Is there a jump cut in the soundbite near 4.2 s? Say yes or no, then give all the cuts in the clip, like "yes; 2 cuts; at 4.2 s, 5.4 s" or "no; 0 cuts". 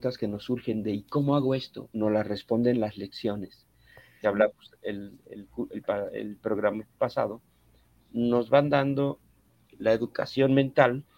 yes; 2 cuts; at 1.9 s, 4.2 s